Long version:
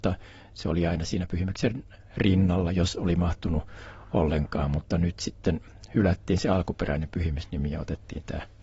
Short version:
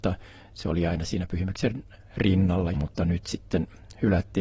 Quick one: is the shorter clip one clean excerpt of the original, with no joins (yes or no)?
no